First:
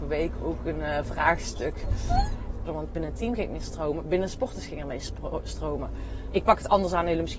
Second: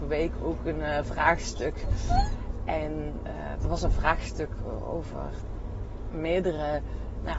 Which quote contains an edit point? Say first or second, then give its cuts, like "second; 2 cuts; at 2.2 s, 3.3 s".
first; 2 cuts; at 2.7 s, 6.3 s